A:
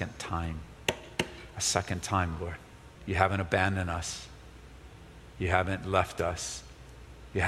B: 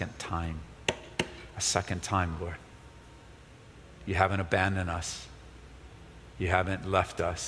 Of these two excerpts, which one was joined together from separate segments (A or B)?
A